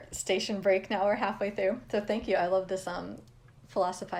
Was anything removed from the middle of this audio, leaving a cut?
no; 0 cuts

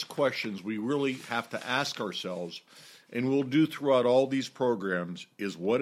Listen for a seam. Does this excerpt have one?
no; 0 cuts

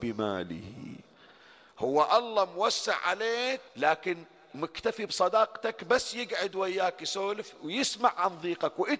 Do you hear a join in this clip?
yes; 1 cut; at 3.7 s

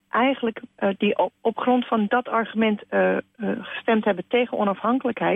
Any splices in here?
no; 0 cuts

